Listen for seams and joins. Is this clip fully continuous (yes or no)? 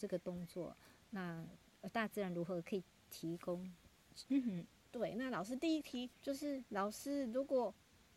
no